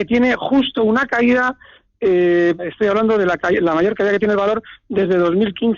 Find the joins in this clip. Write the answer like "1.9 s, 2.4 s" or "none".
2.6 s